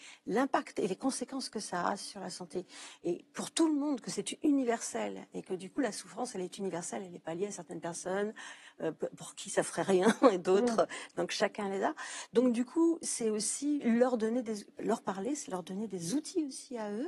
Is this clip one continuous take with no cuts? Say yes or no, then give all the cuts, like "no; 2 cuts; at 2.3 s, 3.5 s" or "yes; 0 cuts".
yes; 0 cuts